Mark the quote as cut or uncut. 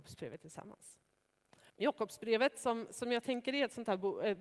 cut